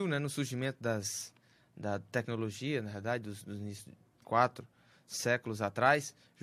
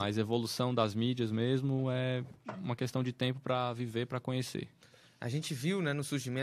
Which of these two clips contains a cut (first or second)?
first